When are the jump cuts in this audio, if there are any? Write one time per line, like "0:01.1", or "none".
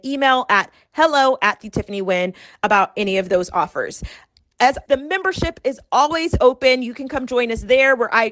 0:04.9